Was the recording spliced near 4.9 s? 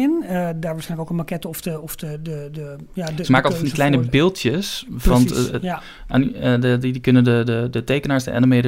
no; 1 cut; at 2.9 s

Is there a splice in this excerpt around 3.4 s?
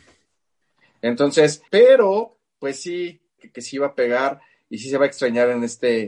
yes; 2 cuts; at 1.7 s, 3.4 s

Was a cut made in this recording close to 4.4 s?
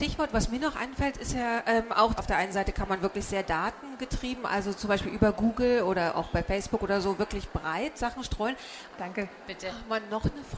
no; 2 cuts; at 2.2 s, 8.9 s

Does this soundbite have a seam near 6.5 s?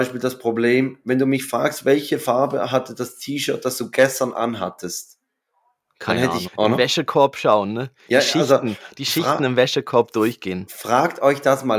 yes; 1 cut; at 6.5 s

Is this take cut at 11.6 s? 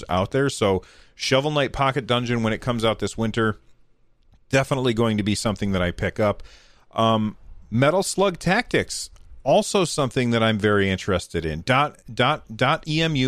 no; 0 cuts

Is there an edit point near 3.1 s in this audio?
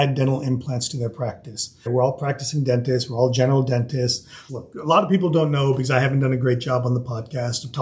no; 2 cuts; at 1.9 s, 4.5 s

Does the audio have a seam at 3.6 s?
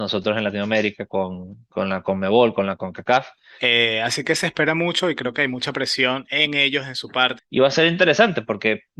yes; 2 cuts; at 3.6 s, 7.4 s

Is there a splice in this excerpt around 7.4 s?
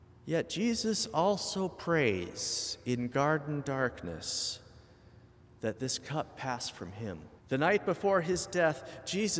yes; 1 cut; at 7.4 s

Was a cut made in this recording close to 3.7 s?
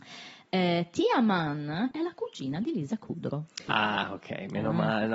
yes; 2 cuts; at 1.9 s, 3.7 s

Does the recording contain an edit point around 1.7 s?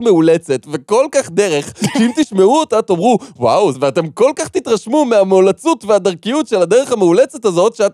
no; 1 cut; at 3.7 s

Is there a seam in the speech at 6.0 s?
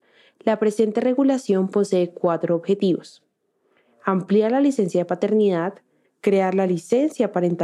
yes; 1 cut; at 6.0 s

